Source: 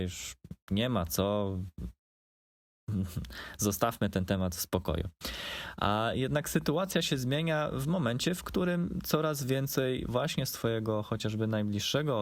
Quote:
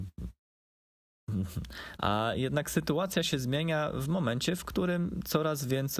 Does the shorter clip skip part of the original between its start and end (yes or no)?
yes